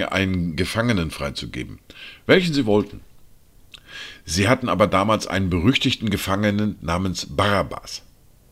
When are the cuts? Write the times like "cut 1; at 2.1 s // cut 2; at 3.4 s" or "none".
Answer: none